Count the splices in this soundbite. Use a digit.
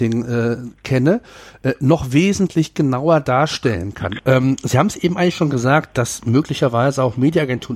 1